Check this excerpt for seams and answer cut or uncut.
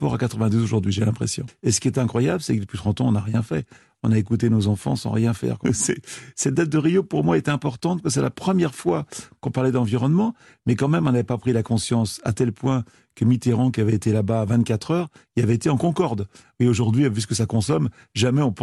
cut